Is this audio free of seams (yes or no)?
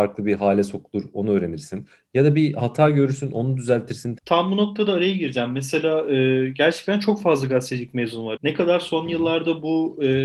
no